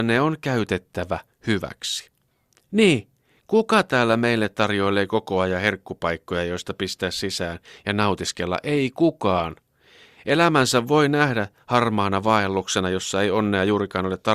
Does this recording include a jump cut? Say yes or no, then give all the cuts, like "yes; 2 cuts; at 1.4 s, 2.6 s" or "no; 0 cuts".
no; 0 cuts